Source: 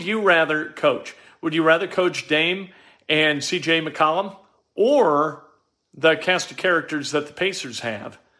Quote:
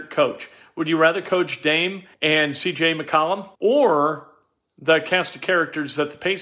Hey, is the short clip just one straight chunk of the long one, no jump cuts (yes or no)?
no